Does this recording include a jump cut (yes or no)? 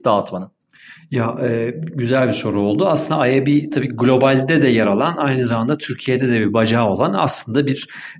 no